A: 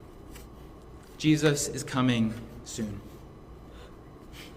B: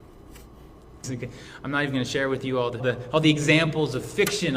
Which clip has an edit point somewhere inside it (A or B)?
B